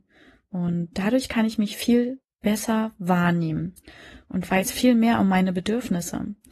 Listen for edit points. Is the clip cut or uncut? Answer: uncut